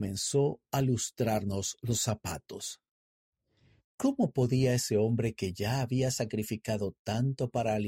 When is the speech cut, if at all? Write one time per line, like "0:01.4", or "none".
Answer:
none